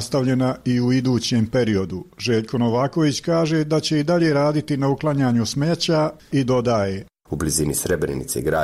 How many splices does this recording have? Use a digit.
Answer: 1